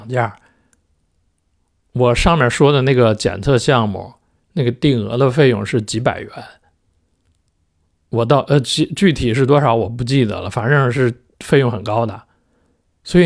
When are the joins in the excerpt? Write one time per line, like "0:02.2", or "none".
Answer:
none